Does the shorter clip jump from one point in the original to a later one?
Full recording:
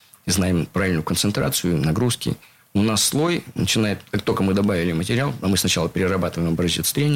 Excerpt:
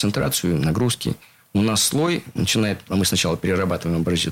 yes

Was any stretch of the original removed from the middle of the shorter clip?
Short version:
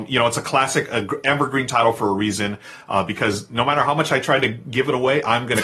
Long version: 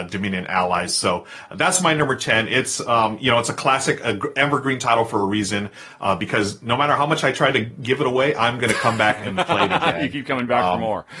no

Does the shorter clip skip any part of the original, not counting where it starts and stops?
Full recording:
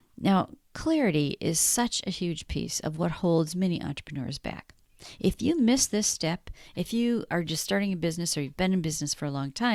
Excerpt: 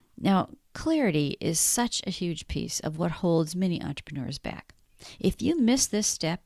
no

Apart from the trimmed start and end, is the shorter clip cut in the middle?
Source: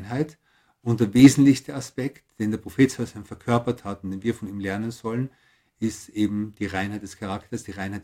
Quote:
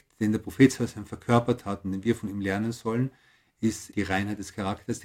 yes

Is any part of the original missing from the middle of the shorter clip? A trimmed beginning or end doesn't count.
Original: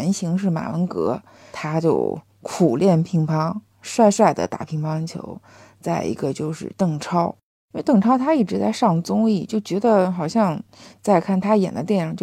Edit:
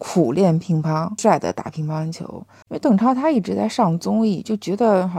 yes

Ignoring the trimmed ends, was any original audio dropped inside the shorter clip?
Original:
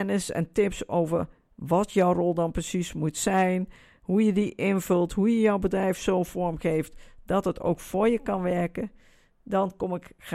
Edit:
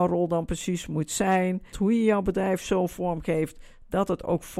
yes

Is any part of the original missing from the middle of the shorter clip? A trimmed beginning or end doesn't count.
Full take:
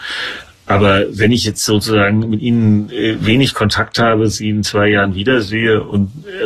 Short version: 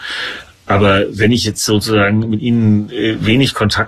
no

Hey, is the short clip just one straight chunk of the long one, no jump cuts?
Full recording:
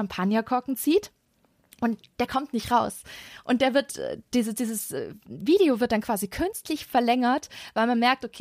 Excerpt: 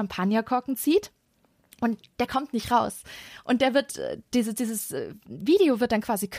yes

